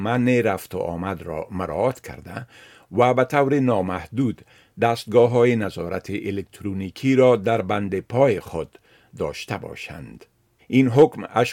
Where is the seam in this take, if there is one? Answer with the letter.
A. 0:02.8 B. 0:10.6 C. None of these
B